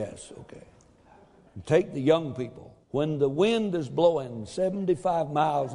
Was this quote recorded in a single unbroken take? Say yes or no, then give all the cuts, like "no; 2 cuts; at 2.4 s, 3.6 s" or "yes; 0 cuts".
no; 2 cuts; at 1.5 s, 2.8 s